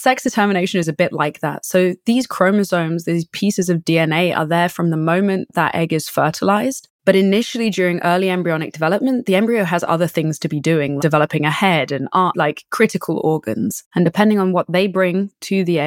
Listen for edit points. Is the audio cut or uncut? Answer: cut